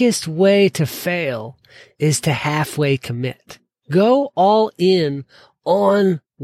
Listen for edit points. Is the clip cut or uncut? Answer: cut